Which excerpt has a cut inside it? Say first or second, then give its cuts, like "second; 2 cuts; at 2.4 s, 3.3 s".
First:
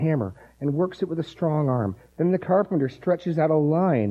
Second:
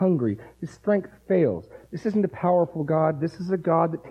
first; 1 cut; at 2.1 s